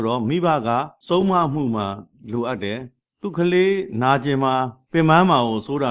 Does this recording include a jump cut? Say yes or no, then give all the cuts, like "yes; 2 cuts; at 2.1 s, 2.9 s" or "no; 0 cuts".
no; 0 cuts